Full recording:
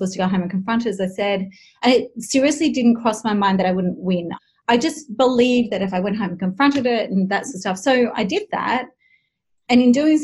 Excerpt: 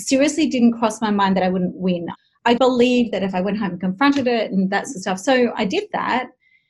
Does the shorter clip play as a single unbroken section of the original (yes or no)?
no